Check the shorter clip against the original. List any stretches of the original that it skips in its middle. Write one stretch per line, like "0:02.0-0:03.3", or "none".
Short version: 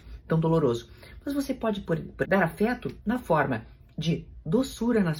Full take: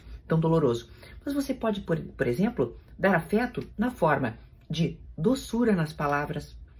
0:02.2-0:03.0